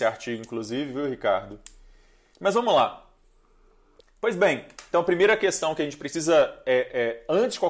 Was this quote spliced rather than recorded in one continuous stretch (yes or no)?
yes